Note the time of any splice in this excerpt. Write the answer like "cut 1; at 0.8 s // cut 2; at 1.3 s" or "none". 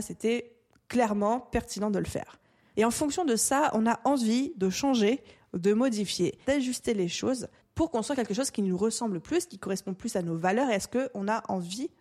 cut 1; at 2.7 s // cut 2; at 6.4 s

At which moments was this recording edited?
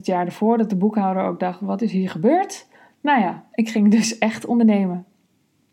none

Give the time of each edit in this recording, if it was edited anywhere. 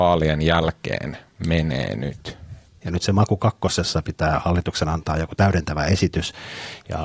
cut 1; at 2.8 s

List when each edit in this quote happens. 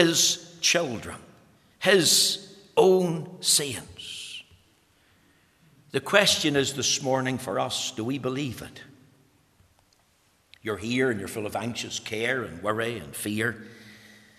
none

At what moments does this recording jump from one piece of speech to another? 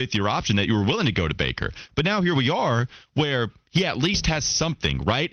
none

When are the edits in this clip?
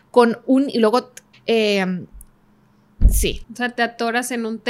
cut 1; at 1.3 s // cut 2; at 3.4 s

